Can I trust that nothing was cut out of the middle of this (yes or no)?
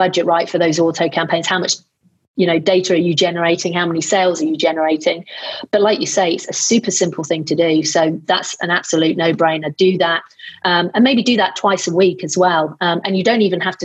yes